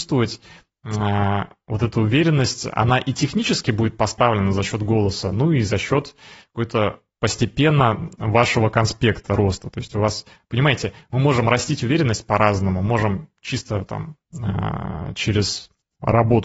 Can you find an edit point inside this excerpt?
no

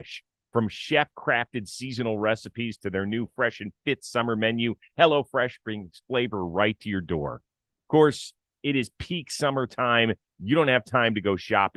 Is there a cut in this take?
no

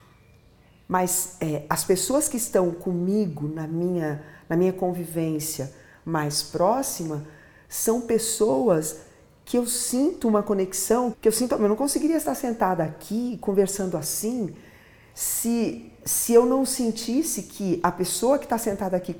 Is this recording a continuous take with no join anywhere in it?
no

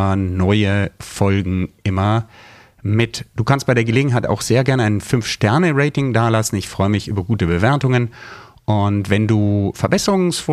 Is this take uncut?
yes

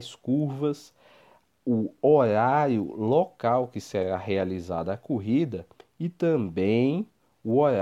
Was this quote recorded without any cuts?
yes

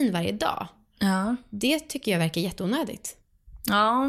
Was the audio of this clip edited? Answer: no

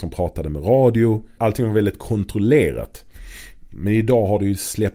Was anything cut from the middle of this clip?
yes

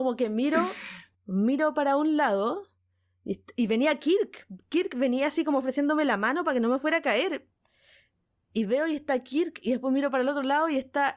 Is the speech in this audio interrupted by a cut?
no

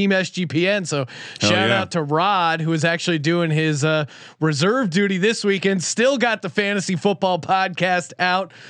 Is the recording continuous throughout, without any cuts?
yes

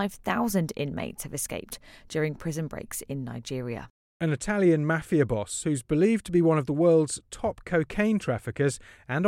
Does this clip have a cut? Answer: no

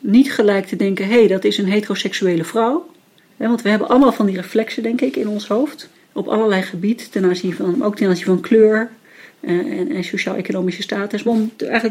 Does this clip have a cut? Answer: no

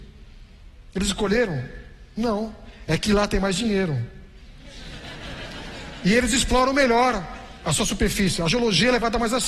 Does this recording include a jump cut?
no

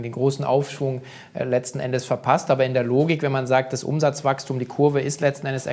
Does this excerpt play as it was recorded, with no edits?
yes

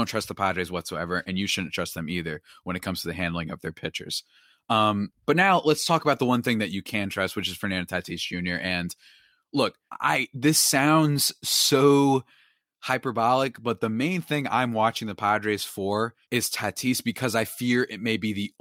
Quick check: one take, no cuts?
no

